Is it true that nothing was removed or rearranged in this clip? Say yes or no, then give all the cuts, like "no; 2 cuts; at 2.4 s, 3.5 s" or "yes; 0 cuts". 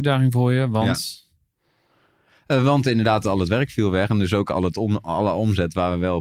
yes; 0 cuts